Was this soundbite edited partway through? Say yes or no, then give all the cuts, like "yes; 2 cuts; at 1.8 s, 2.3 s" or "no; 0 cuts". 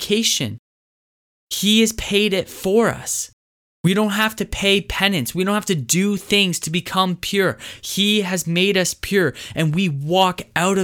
no; 0 cuts